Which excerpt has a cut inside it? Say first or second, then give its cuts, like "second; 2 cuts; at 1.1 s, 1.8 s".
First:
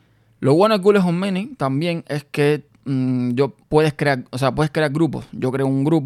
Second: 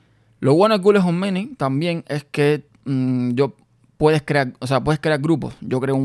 first; 1 cut; at 3.6 s